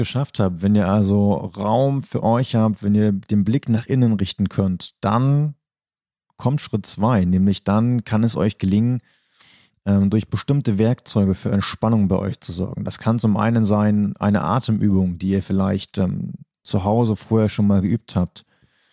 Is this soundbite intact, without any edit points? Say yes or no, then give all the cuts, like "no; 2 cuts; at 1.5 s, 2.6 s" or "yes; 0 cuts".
yes; 0 cuts